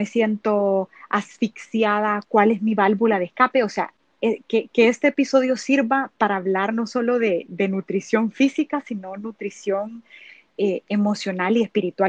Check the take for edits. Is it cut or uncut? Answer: uncut